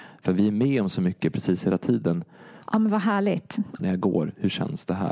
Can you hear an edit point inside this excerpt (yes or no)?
yes